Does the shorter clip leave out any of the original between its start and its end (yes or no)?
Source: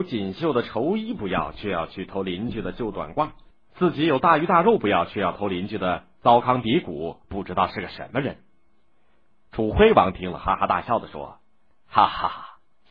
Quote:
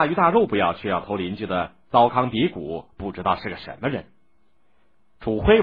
no